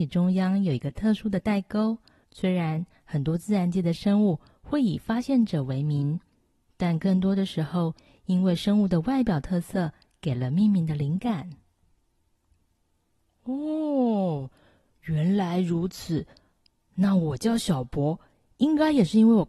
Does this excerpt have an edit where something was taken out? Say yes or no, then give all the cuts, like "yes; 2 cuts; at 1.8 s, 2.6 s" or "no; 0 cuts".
yes; 1 cut; at 2.2 s